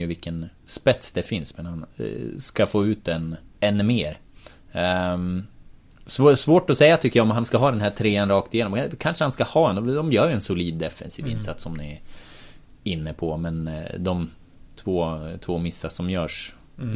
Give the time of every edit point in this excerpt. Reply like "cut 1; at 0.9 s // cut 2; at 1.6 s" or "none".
cut 1; at 3.5 s